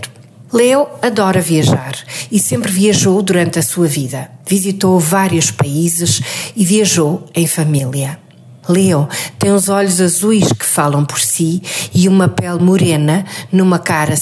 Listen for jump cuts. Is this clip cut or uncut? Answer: uncut